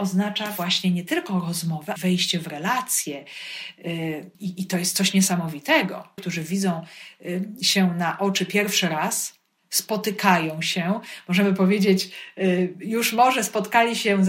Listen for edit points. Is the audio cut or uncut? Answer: cut